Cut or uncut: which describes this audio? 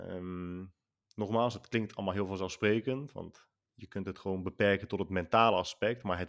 uncut